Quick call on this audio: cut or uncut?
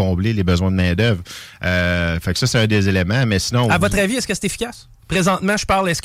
uncut